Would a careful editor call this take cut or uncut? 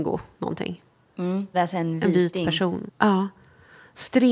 cut